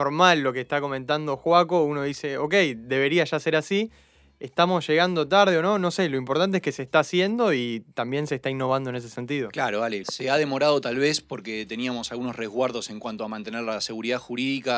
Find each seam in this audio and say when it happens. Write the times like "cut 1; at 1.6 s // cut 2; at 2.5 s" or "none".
cut 1; at 10.0 s

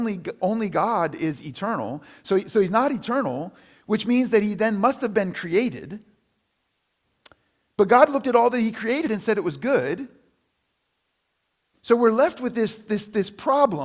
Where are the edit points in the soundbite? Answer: none

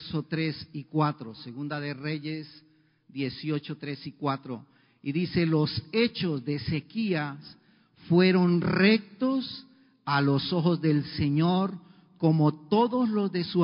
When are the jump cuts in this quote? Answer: none

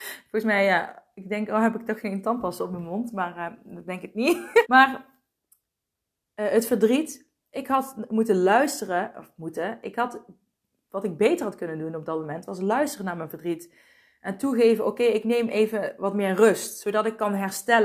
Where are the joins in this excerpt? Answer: cut 1; at 4.6 s

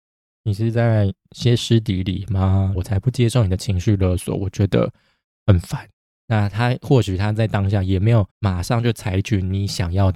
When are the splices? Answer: cut 1; at 2.7 s // cut 2; at 8.3 s

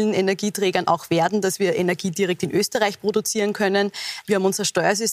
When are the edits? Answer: cut 1; at 4.2 s

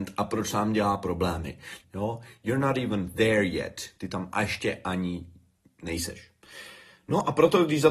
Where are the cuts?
cut 1; at 1.8 s

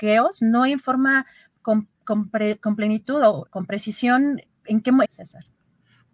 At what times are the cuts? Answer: cut 1; at 3.5 s // cut 2; at 5.0 s

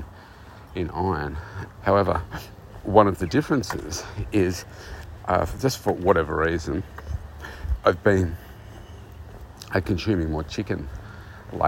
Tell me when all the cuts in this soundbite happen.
cut 1; at 1.8 s

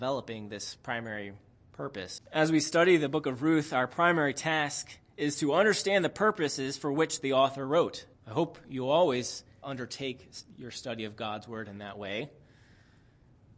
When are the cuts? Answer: cut 1; at 2.2 s // cut 2; at 8.1 s // cut 3; at 9.6 s

